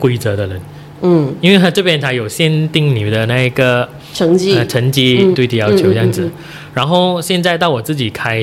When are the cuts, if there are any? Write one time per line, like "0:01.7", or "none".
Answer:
0:01.0
0:05.3